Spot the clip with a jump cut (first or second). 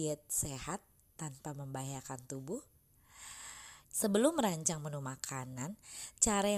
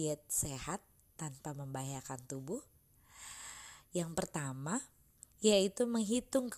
first